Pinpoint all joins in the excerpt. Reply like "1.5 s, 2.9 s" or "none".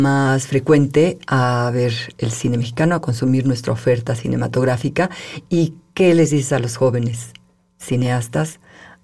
none